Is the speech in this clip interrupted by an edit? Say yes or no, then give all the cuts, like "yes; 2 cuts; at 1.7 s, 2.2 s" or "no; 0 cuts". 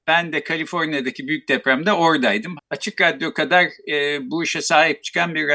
yes; 1 cut; at 2.6 s